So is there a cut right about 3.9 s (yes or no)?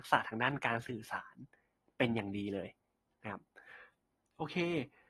no